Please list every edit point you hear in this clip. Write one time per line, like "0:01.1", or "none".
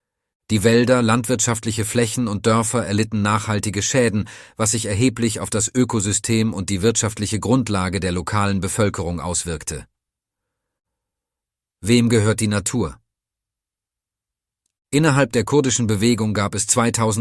none

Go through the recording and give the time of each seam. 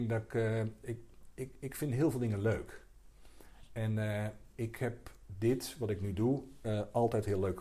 none

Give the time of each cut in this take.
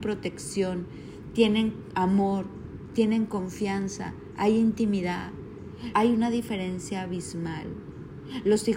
0:05.9

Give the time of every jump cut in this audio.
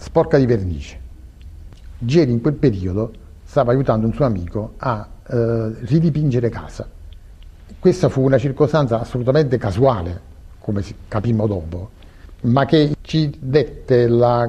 none

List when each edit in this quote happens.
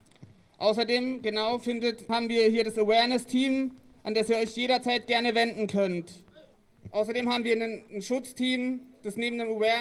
0:02.1

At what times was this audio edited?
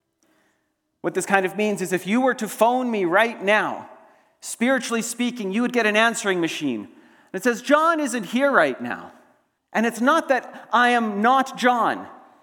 0:09.6

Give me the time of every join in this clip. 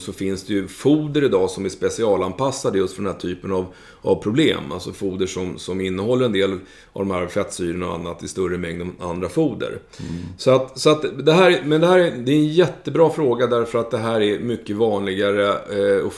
none

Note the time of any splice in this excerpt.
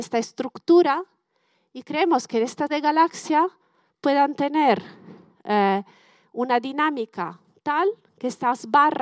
0:02.7

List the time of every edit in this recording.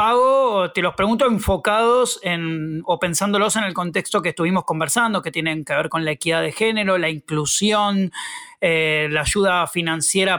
none

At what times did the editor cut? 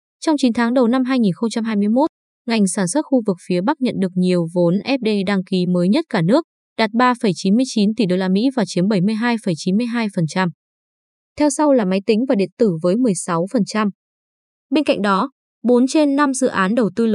0:11.2

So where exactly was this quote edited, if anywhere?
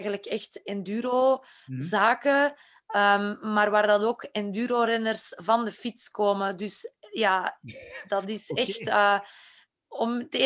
none

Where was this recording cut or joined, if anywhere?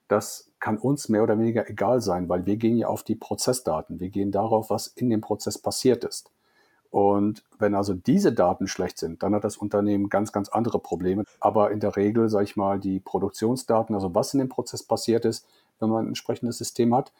0:11.2
0:15.8

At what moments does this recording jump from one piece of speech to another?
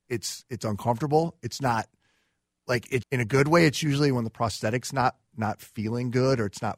0:03.0

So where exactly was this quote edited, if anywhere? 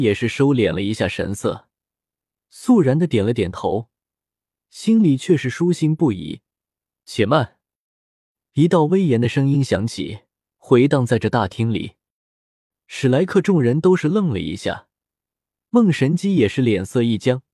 0:07.0

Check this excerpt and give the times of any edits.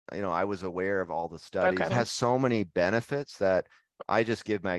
0:01.9

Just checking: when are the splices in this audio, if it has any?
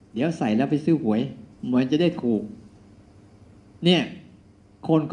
0:01.5

